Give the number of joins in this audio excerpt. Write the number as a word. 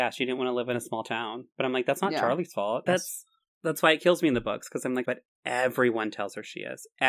two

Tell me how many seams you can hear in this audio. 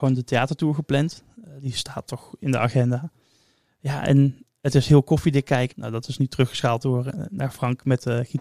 one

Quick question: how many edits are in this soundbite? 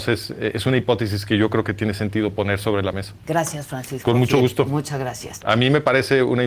two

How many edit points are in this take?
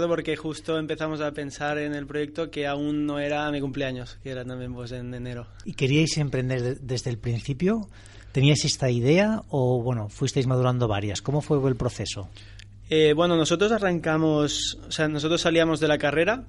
zero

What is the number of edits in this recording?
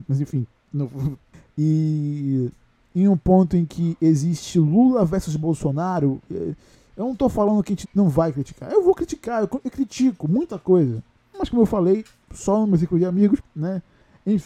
two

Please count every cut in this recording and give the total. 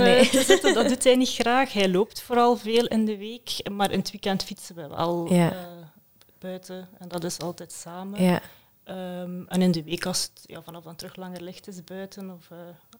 zero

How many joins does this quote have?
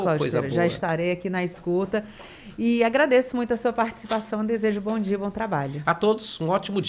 zero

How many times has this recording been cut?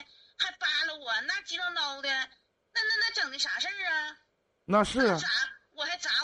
zero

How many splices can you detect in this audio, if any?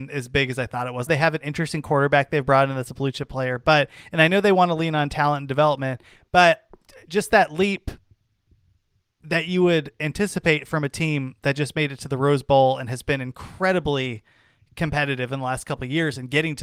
one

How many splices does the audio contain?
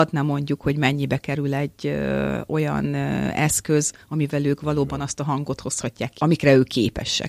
one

